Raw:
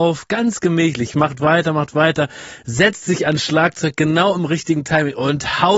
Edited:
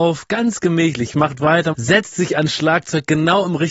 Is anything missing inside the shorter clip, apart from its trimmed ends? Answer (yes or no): yes